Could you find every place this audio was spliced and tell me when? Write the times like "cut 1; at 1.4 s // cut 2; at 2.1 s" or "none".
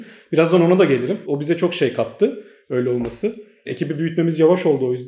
cut 1; at 1.2 s